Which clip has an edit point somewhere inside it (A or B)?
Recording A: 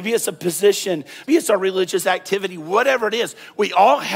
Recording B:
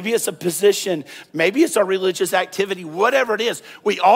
A